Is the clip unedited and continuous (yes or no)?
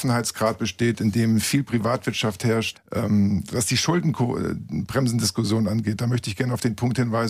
no